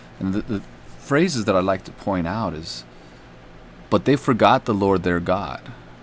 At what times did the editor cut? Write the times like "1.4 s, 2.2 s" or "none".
3.9 s